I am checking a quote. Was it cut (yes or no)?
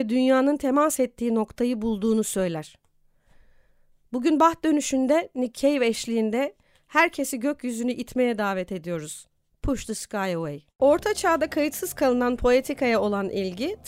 no